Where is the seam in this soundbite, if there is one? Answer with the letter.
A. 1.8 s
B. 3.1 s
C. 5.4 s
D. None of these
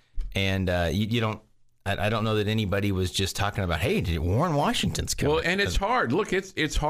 C